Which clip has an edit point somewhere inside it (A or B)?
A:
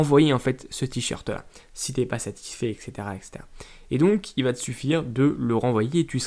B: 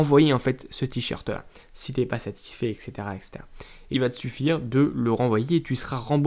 B